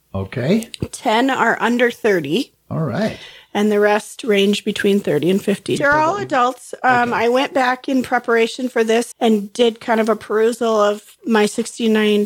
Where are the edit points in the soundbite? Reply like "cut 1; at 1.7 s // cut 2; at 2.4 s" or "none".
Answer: cut 1; at 5.8 s // cut 2; at 9.1 s